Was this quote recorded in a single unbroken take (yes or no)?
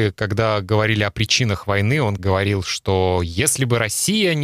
no